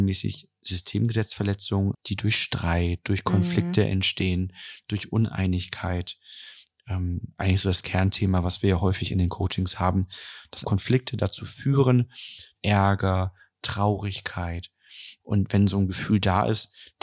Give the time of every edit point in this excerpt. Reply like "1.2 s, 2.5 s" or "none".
1.9 s, 10.6 s, 12.6 s